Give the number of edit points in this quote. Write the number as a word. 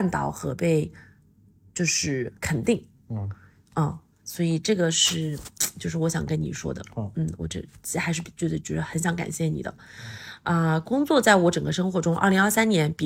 zero